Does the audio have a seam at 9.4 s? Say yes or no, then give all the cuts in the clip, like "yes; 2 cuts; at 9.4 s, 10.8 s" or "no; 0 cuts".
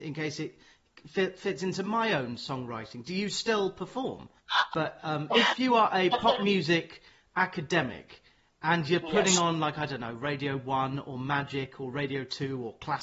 no; 1 cut; at 4.7 s